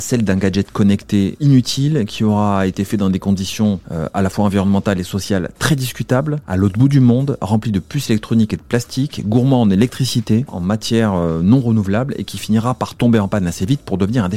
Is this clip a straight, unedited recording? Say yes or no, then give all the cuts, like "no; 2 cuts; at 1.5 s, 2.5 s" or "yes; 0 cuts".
no; 1 cut; at 10.5 s